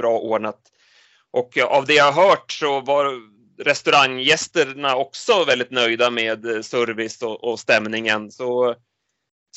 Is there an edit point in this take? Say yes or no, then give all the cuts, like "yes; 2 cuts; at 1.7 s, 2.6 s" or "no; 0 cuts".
no; 0 cuts